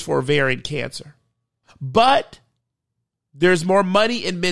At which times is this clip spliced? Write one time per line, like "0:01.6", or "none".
0:01.6